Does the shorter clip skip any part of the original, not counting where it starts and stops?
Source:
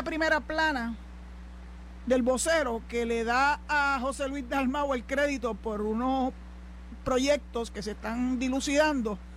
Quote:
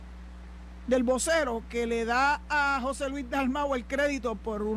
no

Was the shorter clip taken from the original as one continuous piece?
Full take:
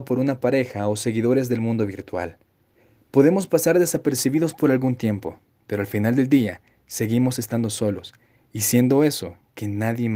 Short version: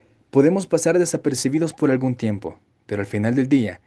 yes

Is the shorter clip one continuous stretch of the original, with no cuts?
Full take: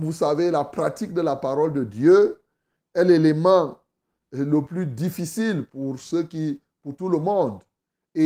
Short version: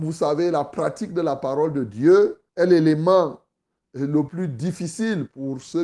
no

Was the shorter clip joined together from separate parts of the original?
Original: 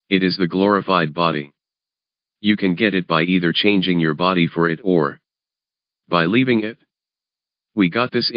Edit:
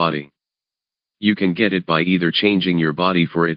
no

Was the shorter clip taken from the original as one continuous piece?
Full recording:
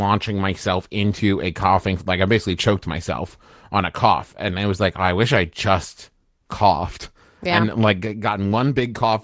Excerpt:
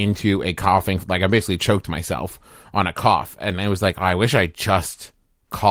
yes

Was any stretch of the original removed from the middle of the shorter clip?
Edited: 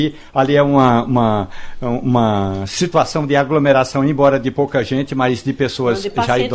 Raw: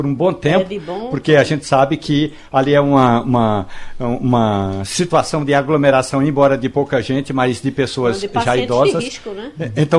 no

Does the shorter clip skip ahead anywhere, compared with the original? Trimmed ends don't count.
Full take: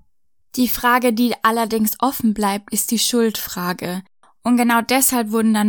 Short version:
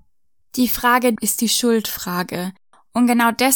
yes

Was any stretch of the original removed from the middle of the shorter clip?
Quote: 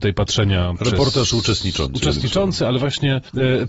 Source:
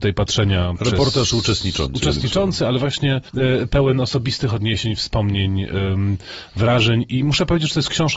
no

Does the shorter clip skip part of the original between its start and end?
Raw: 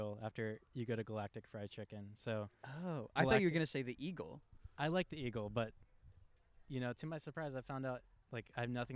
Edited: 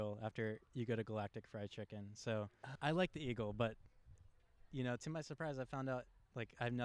yes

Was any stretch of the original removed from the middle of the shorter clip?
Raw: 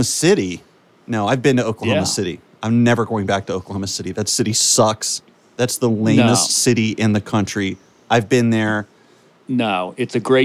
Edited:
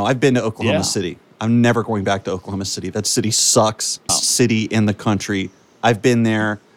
yes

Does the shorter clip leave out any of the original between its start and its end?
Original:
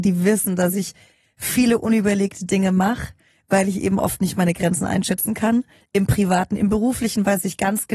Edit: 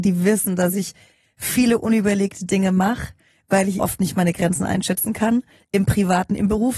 yes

